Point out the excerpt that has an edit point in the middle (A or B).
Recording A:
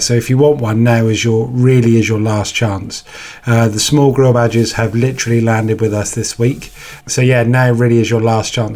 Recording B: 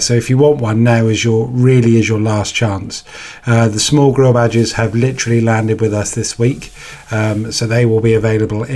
A